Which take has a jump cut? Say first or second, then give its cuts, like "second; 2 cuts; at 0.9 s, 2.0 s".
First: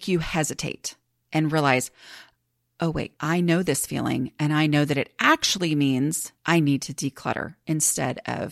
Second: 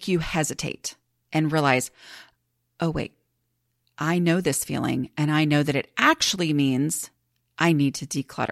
first; 2 cuts; at 3.2 s, 6.4 s